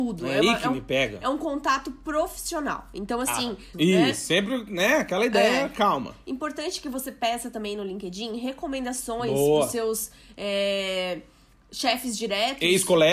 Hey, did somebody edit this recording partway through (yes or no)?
yes